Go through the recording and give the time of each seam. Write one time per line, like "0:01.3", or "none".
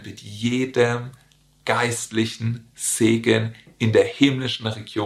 none